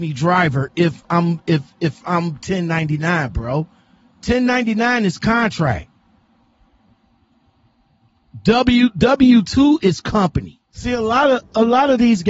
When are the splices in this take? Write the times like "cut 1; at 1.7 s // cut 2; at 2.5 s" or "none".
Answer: none